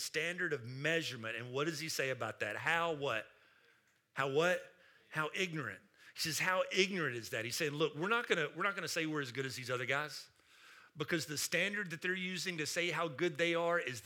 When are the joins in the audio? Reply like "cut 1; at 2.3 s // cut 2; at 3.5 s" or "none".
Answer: none